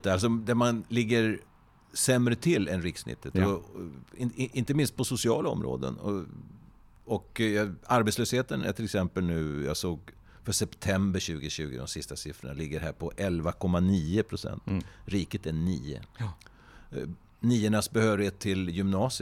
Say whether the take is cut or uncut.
uncut